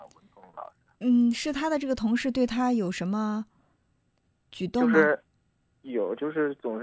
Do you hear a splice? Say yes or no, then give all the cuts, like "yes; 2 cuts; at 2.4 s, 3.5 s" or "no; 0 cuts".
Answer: no; 0 cuts